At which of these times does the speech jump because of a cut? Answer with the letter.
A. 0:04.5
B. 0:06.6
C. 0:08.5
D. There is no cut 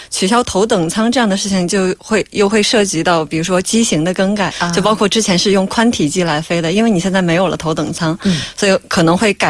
A